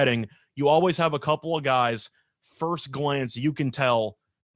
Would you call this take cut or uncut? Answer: uncut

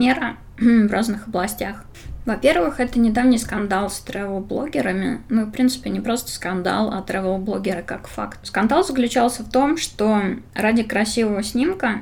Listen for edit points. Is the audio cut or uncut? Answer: uncut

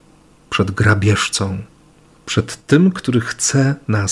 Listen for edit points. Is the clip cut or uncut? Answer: uncut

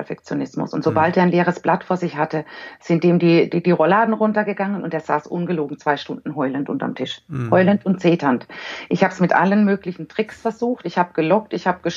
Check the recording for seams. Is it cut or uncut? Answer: uncut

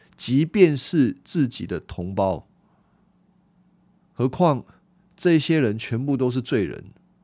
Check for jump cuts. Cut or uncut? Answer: cut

